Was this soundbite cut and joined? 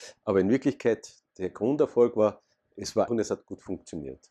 yes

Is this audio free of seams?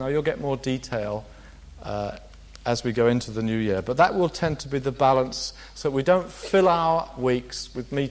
yes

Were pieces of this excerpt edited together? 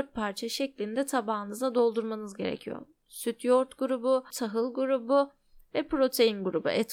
yes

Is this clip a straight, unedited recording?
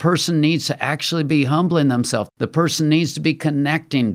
no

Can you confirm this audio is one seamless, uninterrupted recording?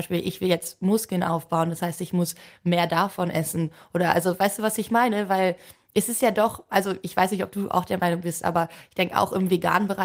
yes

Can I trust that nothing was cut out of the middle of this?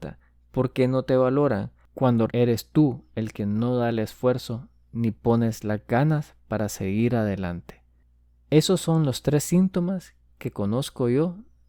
no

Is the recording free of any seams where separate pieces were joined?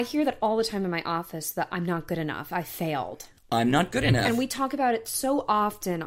yes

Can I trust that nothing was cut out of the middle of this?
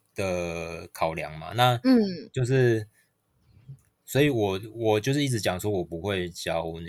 yes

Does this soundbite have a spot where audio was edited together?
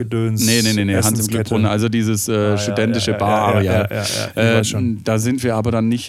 no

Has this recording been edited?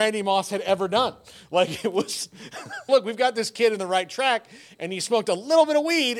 yes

